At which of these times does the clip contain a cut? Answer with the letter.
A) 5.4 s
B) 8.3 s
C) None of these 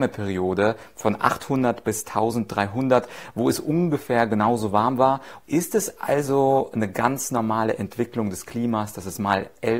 A